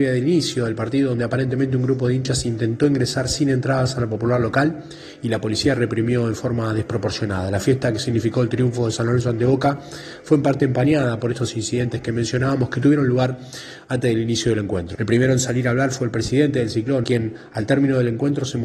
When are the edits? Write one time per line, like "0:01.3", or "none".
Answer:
0:14.9
0:17.0